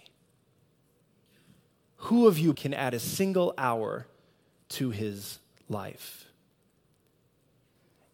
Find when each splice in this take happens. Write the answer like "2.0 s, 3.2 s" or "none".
2.5 s